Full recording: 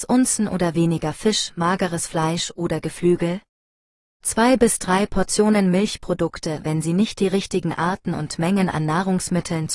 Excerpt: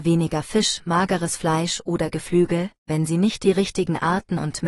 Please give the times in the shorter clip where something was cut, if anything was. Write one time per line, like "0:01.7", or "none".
0:02.9